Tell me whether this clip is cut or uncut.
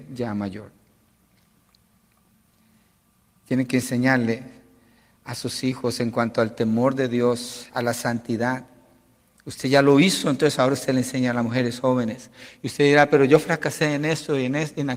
uncut